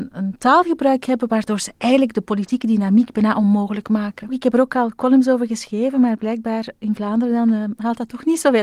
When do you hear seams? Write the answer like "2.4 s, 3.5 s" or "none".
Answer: 4.3 s